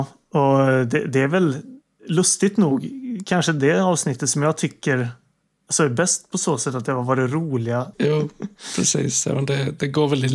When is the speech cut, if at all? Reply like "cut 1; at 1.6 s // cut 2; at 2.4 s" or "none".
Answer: cut 1; at 7.9 s